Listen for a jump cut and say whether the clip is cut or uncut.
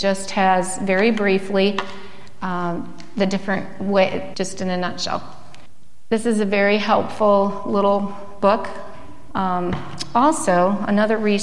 cut